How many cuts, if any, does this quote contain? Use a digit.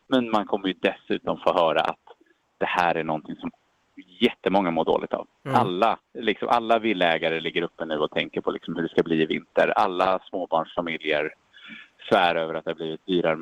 1